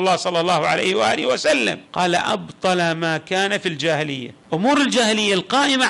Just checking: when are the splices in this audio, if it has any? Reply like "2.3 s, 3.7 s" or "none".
1.8 s, 4.4 s